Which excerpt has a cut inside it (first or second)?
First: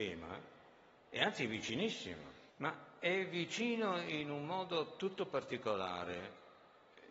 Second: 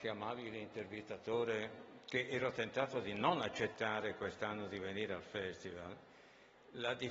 first